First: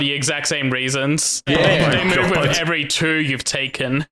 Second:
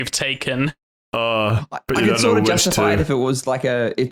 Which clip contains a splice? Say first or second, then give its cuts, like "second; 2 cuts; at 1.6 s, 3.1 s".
first; 1 cut; at 1.5 s